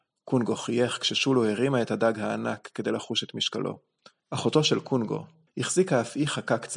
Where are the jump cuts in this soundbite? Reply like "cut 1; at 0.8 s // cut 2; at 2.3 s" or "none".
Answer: cut 1; at 4.2 s // cut 2; at 5.5 s